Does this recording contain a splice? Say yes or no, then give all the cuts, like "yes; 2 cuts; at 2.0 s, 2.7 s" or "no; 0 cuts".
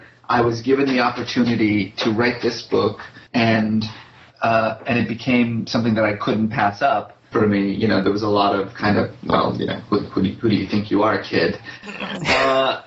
yes; 3 cuts; at 3.3 s, 7.3 s, 11.8 s